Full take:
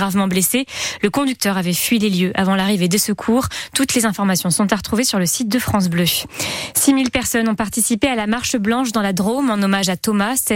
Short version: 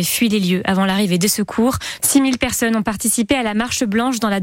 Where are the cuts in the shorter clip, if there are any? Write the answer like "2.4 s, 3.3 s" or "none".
2.0 s

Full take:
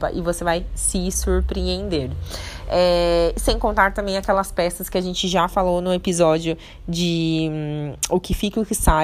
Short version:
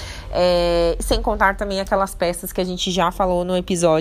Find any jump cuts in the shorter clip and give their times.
none

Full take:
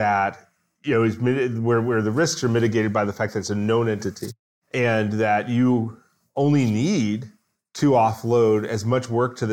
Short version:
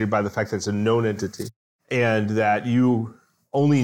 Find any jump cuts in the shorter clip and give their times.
none

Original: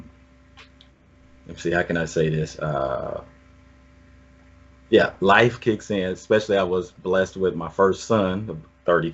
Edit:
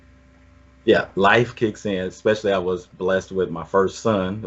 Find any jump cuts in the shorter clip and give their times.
none

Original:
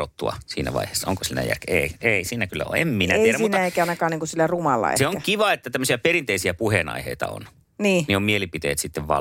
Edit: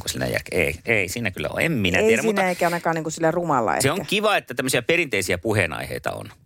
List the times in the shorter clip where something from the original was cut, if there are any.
none

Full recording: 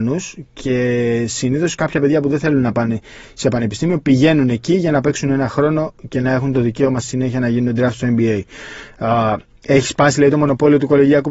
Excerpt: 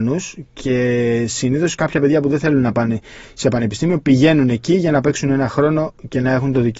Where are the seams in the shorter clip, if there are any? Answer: none

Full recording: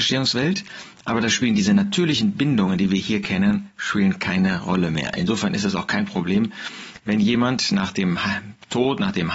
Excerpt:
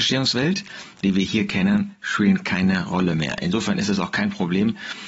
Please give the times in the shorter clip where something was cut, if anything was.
1.0 s

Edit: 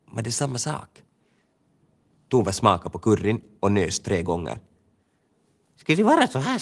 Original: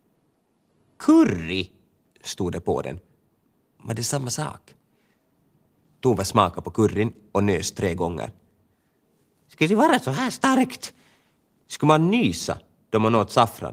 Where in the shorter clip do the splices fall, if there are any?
none

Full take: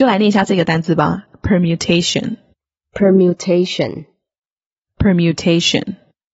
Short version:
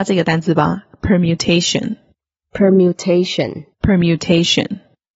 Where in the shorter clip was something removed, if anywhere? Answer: 3.7 s

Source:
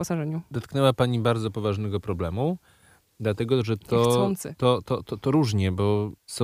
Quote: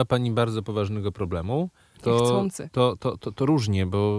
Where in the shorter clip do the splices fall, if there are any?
1.9 s

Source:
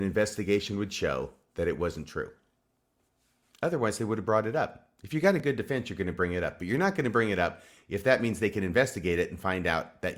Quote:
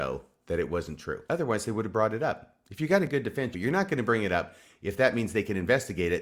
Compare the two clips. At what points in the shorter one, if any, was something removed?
1.3 s, 3.5 s

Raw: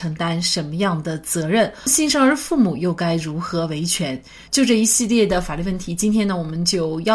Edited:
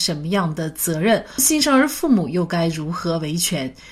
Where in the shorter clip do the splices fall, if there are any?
none

